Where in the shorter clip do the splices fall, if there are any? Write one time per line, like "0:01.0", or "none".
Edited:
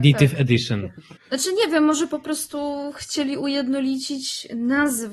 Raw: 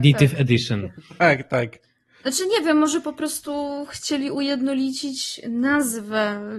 0:01.2